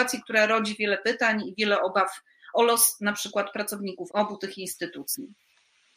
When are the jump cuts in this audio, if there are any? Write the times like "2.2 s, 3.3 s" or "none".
4.1 s